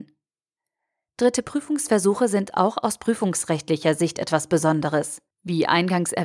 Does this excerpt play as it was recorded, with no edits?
no; 1 cut; at 5.3 s

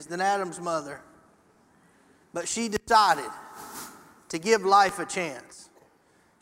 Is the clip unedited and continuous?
yes; 0 cuts

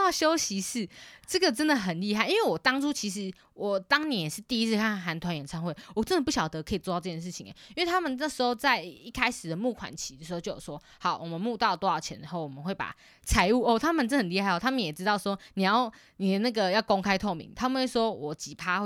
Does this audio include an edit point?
no; 0 cuts

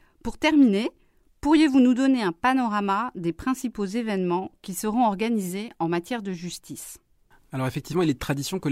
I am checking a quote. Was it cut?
no; 0 cuts

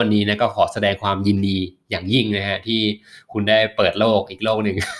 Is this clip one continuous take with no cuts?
yes; 0 cuts

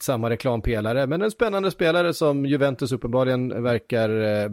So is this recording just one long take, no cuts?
yes; 0 cuts

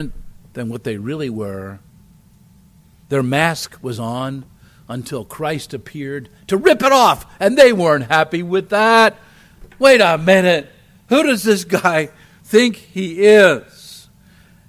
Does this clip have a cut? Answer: no; 0 cuts

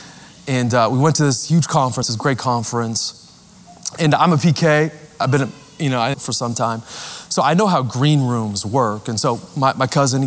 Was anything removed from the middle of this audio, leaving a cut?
yes; 2 cuts; at 2.0 s, 6.1 s

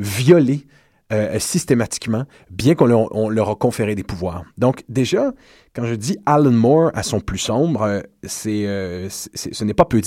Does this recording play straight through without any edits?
yes; 0 cuts

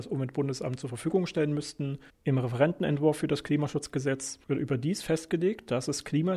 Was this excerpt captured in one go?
no; 1 cut; at 2.1 s

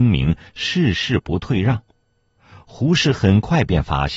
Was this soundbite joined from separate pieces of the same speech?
no; 0 cuts

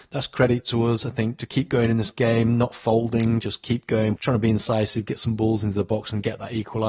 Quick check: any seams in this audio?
yes; 1 cut; at 4.2 s

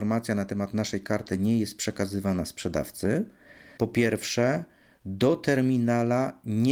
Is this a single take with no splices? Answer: no; 1 cut; at 3.8 s

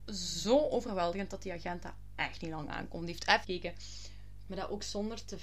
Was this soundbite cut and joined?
yes; 2 cuts; at 3.4 s, 4.5 s

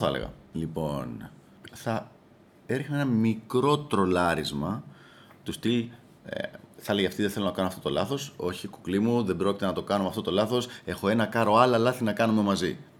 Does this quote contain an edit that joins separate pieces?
yes; 1 cut; at 1.7 s

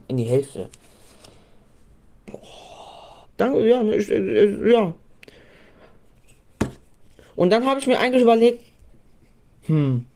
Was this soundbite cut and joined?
yes; 1 cut; at 3.2 s

